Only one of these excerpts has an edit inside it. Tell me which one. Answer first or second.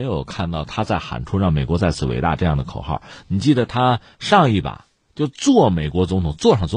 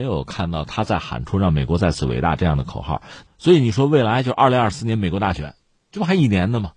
second